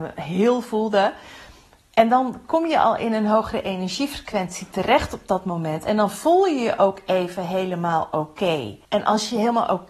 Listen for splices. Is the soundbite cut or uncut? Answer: cut